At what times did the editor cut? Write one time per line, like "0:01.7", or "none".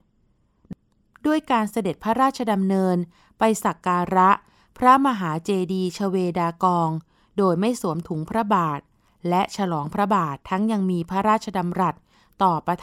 0:10.4